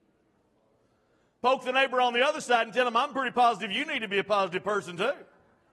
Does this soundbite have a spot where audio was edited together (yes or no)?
no